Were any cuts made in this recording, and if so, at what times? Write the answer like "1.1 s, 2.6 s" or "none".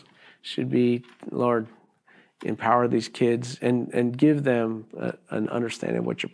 none